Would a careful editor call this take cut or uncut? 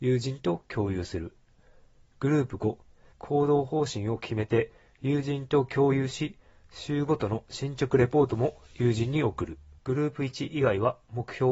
cut